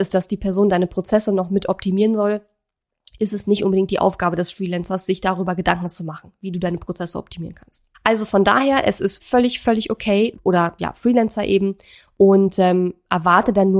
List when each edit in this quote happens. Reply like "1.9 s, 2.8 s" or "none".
7.9 s, 9.2 s, 10.3 s